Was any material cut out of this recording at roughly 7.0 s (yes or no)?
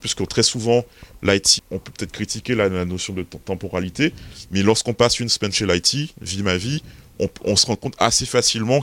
no